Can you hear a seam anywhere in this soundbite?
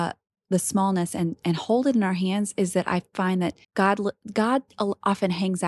yes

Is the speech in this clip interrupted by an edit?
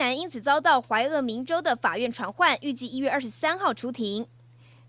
no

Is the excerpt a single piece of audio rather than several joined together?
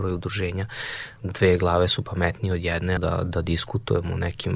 no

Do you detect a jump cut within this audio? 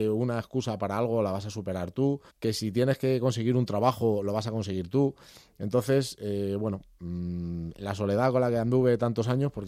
yes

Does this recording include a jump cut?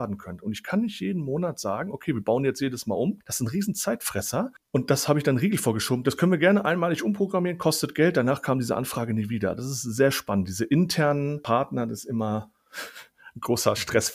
no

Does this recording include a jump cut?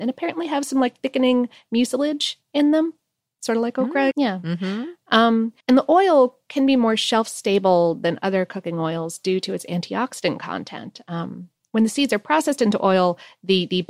yes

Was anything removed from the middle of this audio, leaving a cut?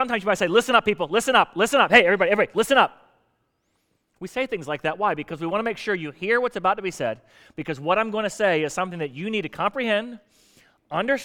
yes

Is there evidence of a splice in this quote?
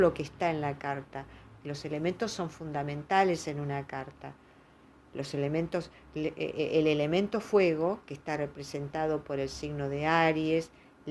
yes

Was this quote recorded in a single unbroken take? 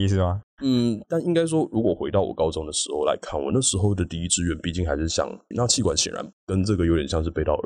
no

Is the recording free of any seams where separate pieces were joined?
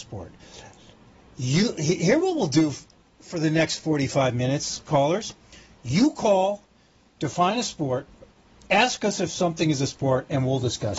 yes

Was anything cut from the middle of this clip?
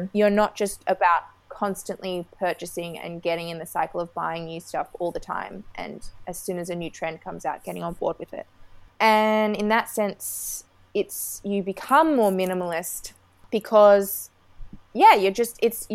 no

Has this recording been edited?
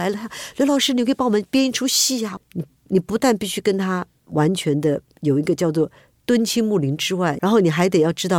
yes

